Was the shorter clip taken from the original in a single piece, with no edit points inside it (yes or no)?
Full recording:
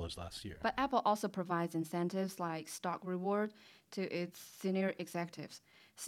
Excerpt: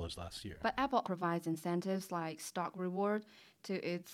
no